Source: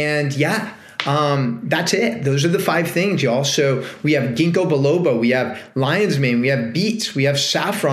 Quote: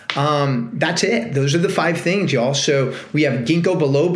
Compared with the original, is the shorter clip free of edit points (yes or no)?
yes